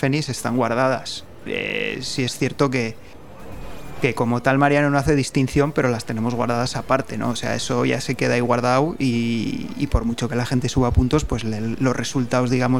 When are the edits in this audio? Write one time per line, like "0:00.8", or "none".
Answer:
none